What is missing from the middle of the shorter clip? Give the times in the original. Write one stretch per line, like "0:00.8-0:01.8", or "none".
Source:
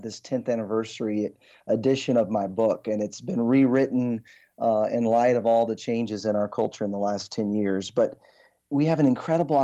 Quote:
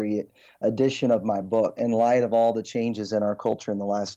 0:02.8-0:04.9

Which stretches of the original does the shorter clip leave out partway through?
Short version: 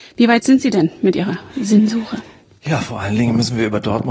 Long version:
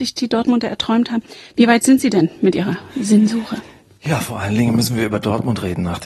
none

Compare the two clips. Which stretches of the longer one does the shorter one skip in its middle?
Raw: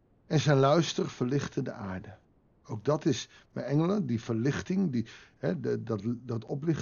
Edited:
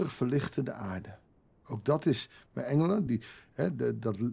0:04.1-0:04.9

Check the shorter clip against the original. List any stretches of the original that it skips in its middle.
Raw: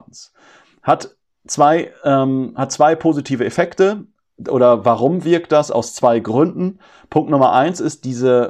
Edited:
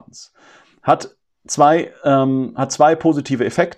none

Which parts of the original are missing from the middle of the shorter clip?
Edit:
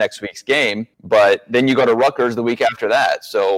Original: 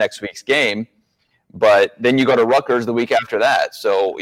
0:00.9-0:01.4

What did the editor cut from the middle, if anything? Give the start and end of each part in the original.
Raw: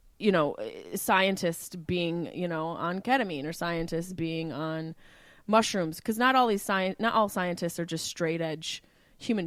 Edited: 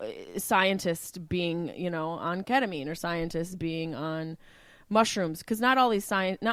none

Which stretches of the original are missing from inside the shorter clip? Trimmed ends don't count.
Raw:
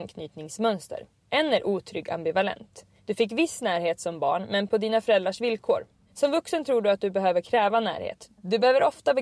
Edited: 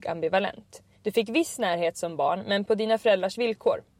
none

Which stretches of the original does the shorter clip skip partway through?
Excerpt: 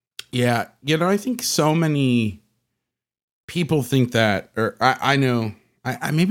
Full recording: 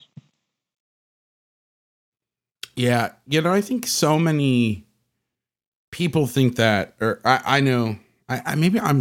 none

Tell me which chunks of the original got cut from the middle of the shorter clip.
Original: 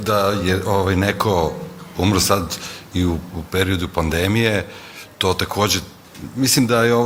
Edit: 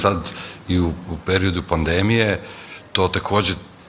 none

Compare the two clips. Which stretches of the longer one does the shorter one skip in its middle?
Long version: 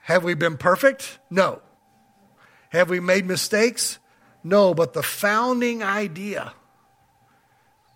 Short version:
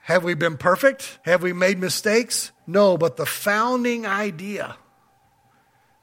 0:01.2-0:02.7
0:04.0-0:04.3

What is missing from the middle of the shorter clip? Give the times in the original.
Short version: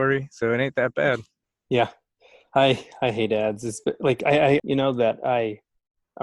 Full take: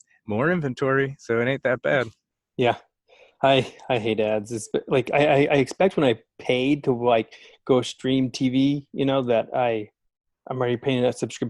0:05.5-0:08.9

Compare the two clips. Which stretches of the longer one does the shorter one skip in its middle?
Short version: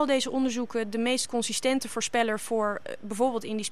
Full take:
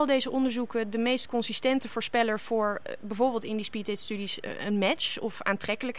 none

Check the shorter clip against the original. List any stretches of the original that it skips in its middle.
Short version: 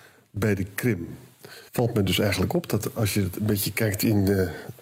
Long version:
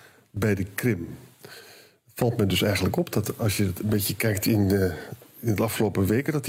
0:01.7-0:02.1

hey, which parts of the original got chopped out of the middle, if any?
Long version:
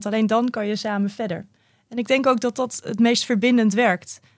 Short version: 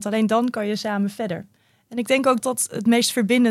0:02.4-0:02.5

